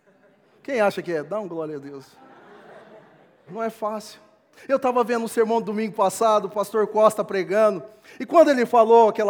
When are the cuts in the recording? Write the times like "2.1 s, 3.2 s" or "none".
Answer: 3.5 s